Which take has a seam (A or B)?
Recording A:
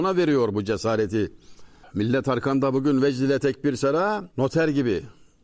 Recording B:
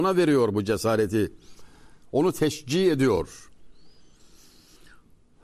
A